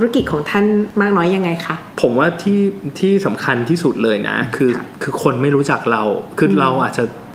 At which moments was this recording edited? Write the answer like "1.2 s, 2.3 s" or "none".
none